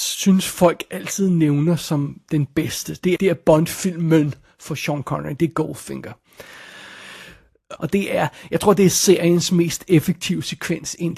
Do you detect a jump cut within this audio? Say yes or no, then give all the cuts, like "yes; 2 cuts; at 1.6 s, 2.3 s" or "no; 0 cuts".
yes; 2 cuts; at 3.2 s, 7.8 s